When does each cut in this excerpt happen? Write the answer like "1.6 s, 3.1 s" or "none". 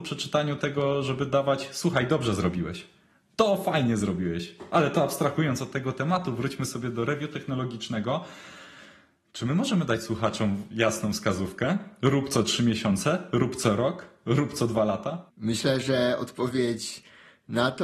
none